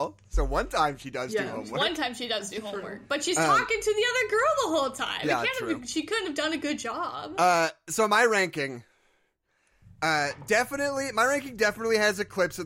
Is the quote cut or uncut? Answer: uncut